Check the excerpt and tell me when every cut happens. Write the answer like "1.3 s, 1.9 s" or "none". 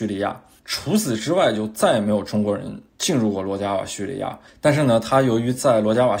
4.5 s